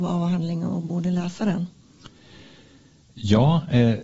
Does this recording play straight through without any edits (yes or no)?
yes